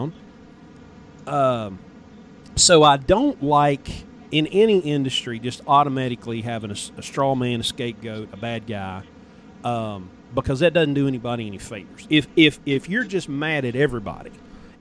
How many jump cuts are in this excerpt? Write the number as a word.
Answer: zero